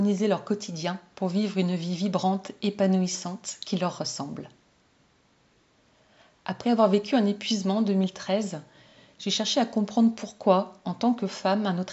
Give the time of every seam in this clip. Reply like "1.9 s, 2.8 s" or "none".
none

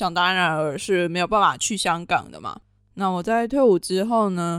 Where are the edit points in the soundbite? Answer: none

